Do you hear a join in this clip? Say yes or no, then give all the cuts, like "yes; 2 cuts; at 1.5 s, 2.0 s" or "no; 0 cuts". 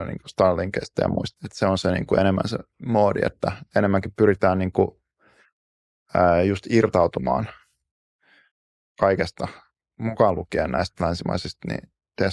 yes; 1 cut; at 1.4 s